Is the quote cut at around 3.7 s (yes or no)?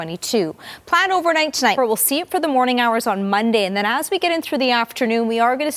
no